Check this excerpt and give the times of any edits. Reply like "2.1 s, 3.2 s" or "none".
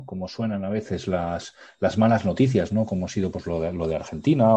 none

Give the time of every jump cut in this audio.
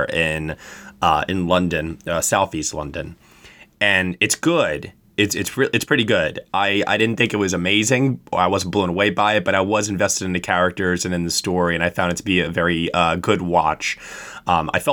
none

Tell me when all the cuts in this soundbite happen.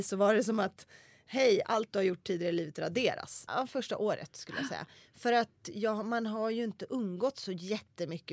3.5 s

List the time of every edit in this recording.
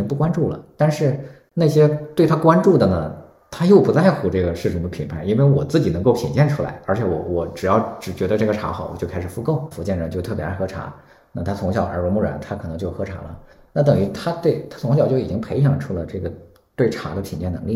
9.7 s

